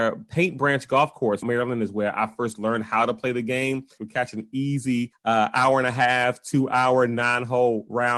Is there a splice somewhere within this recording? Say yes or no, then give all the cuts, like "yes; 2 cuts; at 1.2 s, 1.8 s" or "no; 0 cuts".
yes; 2 cuts; at 1.4 s, 4.0 s